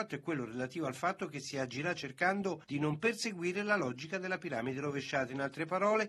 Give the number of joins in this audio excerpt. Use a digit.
0